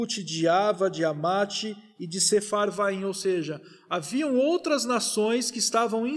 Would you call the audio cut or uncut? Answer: uncut